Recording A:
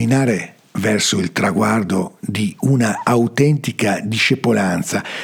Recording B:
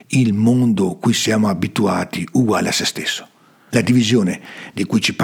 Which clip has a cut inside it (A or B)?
B